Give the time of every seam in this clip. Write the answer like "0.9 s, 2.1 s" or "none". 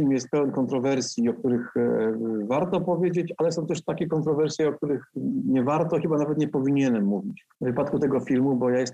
7.5 s